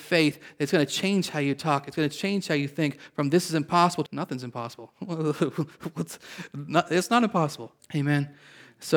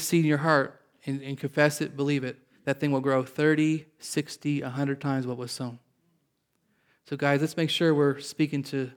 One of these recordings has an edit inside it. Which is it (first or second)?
first